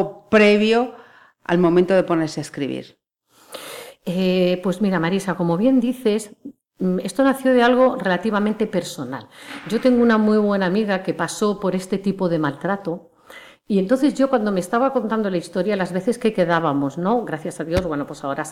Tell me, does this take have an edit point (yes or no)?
no